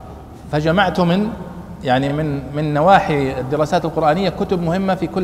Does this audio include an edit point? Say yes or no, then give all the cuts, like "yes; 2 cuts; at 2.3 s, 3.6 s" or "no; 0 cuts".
no; 0 cuts